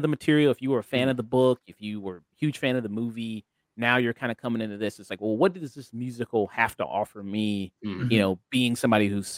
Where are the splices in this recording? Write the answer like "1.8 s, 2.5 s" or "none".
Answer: none